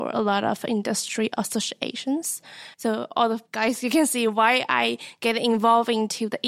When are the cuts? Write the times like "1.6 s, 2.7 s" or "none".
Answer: 2.7 s